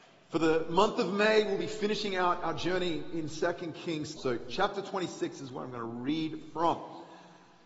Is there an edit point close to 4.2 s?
yes; 1 cut; at 4.2 s

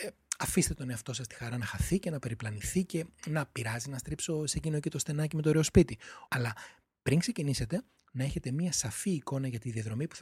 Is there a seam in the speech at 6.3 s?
yes; 1 cut; at 6.3 s

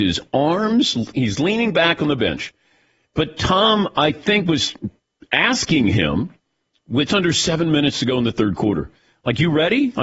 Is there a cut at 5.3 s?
no; 2 cuts; at 3.1 s, 7.1 s

